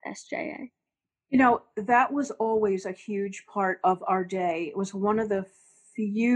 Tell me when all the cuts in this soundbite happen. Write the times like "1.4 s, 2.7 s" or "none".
none